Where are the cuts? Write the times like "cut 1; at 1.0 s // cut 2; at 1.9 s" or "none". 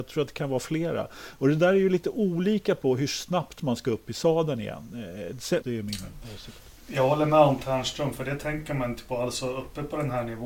cut 1; at 5.6 s